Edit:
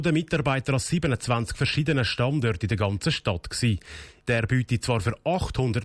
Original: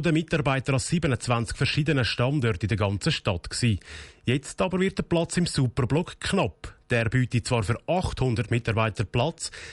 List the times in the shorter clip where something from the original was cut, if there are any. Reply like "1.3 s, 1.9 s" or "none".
4.2 s

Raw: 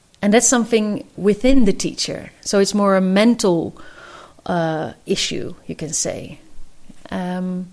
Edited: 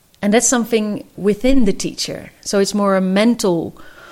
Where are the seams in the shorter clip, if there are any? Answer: none

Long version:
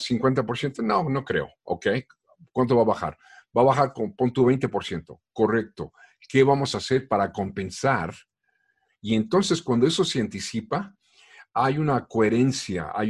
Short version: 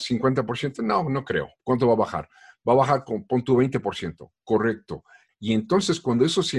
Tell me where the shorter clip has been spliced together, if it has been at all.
1.6 s, 5.3 s

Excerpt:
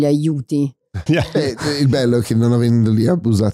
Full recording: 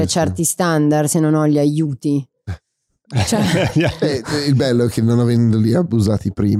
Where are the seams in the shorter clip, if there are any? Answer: 1.1 s

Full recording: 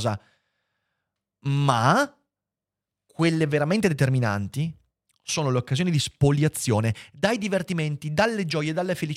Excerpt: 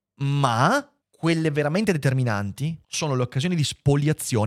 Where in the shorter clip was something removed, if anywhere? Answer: 1.0 s, 2.8 s

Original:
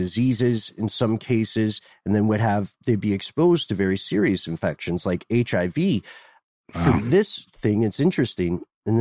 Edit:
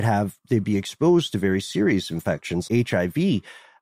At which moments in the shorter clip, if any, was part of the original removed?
2.7 s

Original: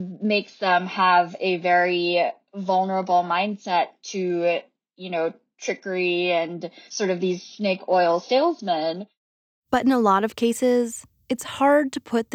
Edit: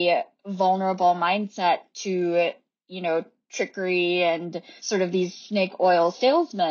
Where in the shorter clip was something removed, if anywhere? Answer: none

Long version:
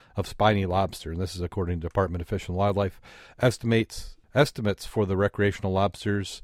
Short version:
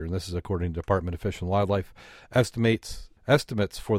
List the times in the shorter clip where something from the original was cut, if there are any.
none

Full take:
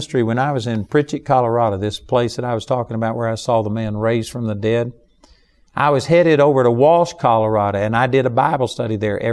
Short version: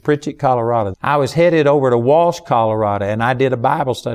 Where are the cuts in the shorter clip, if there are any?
0.9 s

